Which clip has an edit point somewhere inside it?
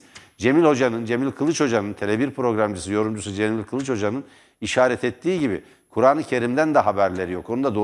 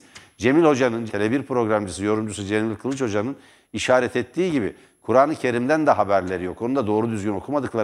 second; 1 cut; at 1.1 s

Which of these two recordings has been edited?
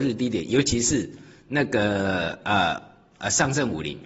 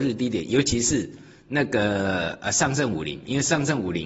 second; 1 cut; at 2.4 s

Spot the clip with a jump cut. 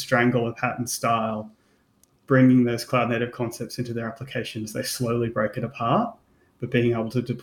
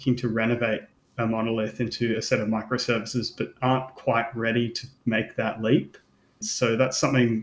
second; 1 cut; at 6.4 s

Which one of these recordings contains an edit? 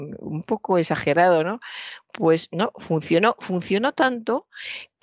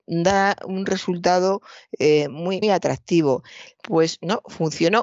second; 2 cuts; at 2.6 s, 3.8 s

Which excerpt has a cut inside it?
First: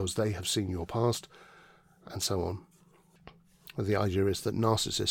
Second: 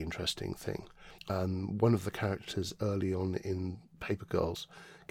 second; 1 cut; at 1.2 s

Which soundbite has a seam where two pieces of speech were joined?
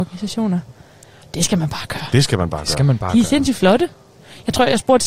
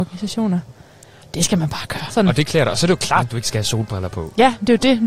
second; 1 cut; at 2.1 s

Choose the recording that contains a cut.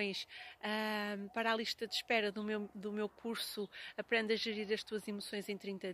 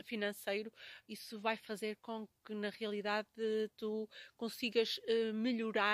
second; 1 cut; at 1.0 s

